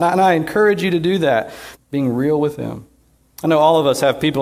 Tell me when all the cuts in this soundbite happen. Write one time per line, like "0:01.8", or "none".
0:01.7